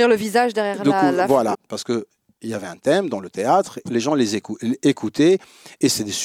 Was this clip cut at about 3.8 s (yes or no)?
no